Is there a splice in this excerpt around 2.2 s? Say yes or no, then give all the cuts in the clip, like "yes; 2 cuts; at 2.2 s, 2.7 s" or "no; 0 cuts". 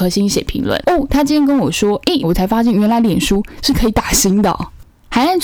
yes; 1 cut; at 2.2 s